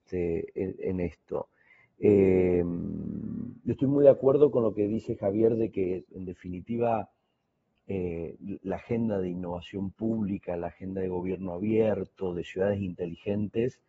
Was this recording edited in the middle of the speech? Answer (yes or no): no